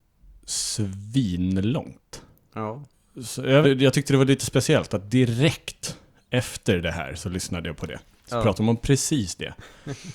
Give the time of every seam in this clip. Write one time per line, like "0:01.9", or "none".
0:03.6